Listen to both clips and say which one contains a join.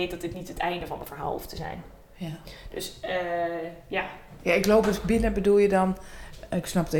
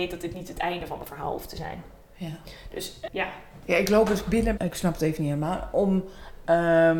second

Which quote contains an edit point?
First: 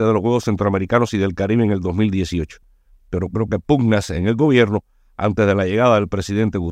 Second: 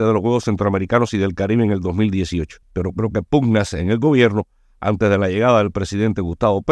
second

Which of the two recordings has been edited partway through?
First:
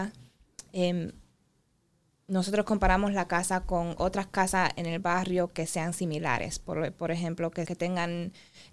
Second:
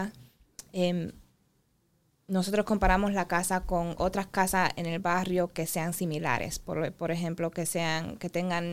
first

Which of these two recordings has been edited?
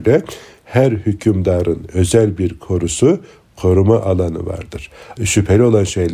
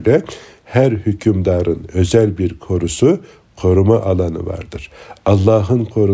first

